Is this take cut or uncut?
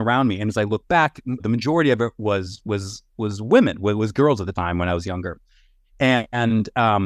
cut